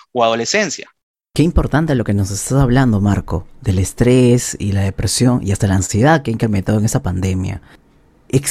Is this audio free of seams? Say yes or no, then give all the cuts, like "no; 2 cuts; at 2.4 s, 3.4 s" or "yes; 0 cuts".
yes; 0 cuts